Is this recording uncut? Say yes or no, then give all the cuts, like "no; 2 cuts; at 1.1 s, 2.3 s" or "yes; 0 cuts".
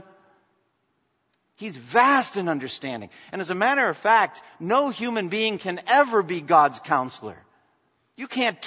yes; 0 cuts